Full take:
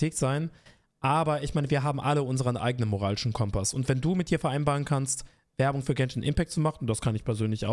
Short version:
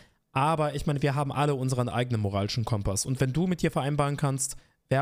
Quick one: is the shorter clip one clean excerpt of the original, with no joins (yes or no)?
yes